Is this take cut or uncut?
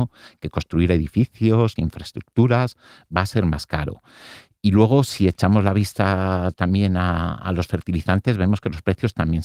cut